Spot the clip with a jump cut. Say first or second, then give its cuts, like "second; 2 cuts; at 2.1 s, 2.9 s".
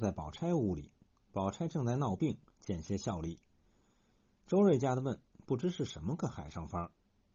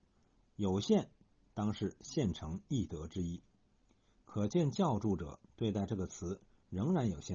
first; 1 cut; at 2.5 s